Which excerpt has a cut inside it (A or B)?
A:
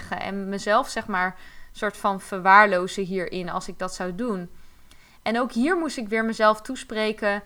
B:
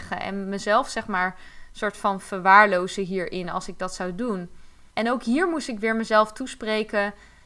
B